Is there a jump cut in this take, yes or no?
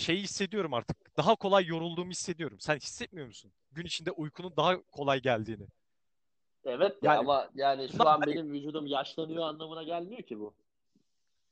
no